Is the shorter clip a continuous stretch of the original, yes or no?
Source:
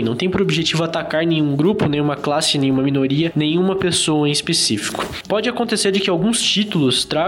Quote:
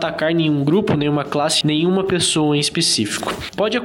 no